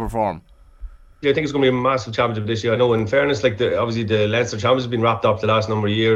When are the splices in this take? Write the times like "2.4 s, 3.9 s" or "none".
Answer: 1.2 s, 2.8 s